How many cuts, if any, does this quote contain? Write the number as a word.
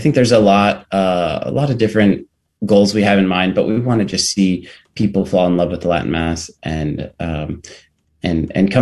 zero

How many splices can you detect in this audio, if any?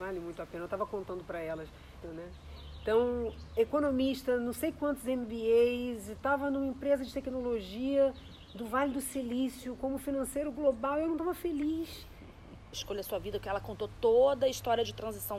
two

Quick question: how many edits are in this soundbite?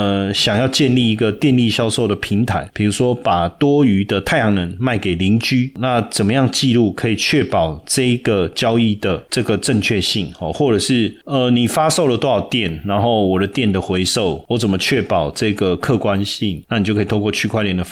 zero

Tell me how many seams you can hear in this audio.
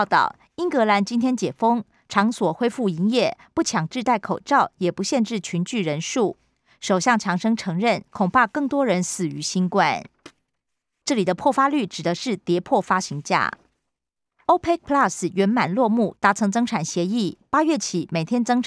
three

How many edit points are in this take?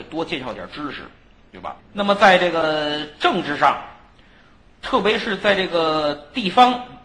one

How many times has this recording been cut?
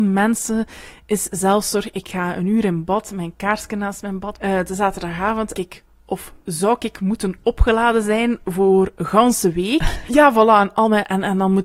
three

